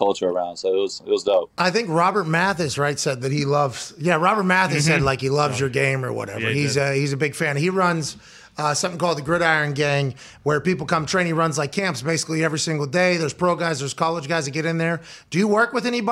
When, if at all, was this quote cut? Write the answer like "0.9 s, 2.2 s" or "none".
none

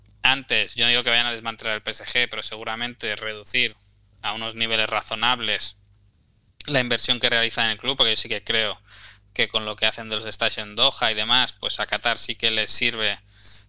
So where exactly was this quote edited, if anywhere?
none

